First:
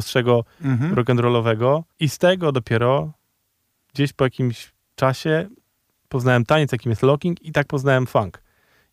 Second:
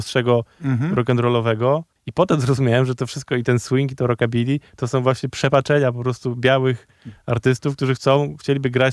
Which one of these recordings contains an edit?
second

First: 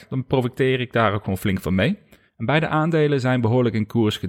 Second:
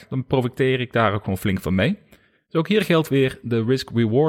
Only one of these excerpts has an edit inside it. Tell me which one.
first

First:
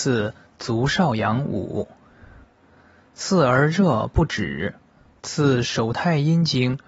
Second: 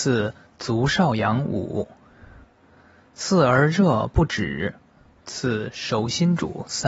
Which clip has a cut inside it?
first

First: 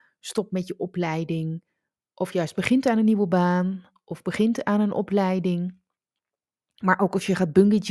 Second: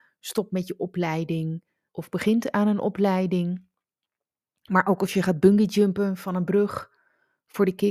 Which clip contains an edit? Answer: second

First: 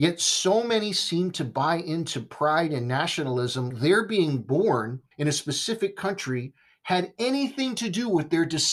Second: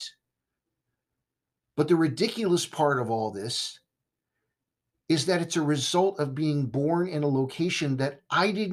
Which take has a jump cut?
first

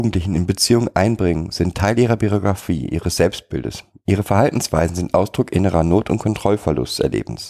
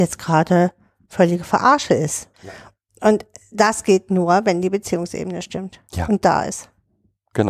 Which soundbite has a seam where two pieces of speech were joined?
second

